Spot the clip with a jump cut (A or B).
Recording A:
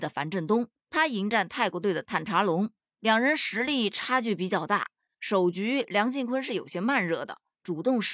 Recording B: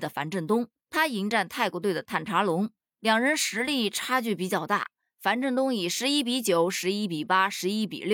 A